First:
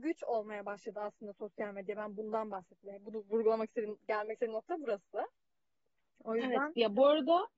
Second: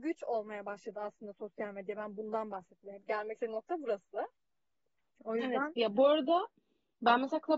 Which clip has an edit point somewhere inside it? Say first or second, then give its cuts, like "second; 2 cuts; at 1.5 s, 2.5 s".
second; 1 cut; at 3.0 s